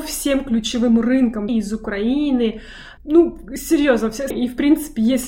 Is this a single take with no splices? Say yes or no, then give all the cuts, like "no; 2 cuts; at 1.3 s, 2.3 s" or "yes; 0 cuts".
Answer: no; 3 cuts; at 1.5 s, 3.0 s, 4.3 s